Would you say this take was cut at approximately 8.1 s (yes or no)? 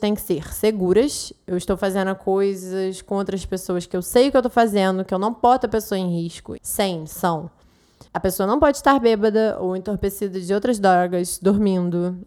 yes